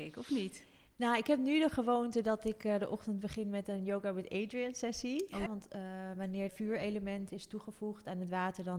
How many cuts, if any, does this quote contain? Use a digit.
2